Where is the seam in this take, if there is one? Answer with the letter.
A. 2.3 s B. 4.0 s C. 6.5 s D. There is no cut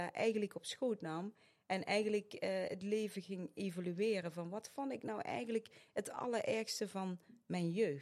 D